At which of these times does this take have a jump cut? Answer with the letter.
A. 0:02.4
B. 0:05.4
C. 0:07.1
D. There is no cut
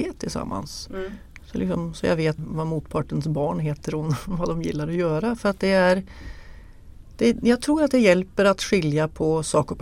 A